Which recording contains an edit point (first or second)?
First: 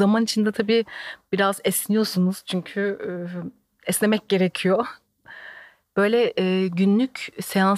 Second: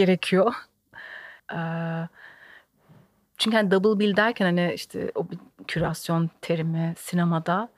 second